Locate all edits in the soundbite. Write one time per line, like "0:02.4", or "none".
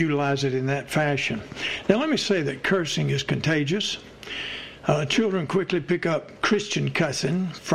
none